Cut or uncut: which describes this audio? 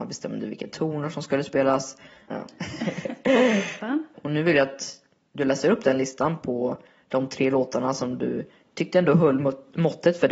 cut